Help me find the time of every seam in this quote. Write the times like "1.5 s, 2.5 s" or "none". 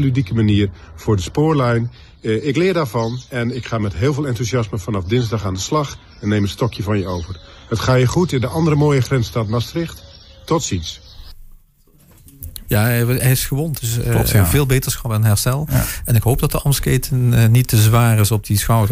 12.6 s, 13.8 s